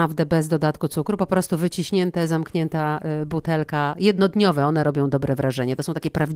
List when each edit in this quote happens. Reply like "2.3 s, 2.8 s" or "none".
none